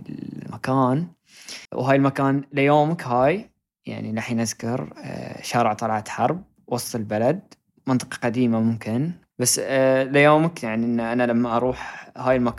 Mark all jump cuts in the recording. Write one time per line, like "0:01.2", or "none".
0:01.7